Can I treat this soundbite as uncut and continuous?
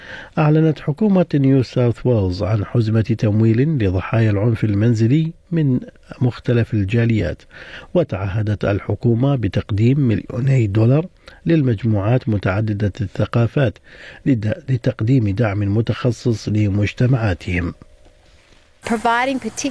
yes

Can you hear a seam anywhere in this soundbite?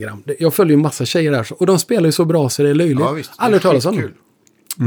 no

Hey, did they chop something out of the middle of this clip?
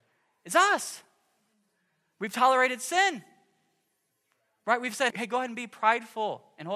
yes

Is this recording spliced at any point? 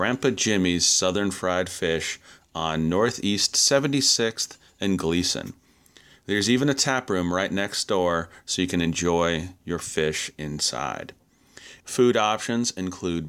yes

